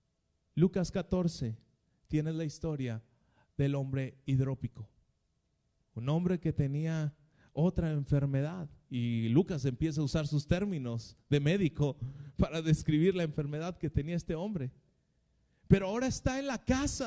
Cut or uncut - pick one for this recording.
uncut